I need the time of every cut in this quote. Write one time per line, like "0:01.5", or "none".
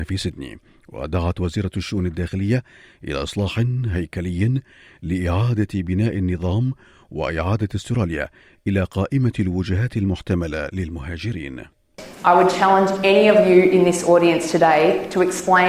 none